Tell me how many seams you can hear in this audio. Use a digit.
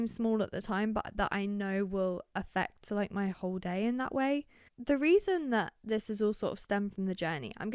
1